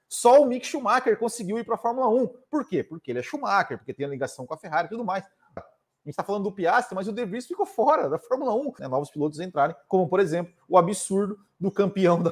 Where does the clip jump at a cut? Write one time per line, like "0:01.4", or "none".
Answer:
0:05.6
0:08.8